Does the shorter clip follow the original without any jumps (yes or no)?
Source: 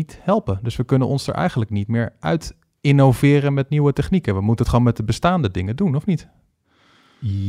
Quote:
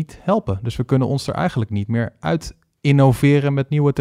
yes